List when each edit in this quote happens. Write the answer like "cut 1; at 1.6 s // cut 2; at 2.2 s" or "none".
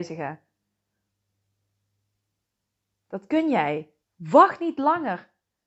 cut 1; at 4.0 s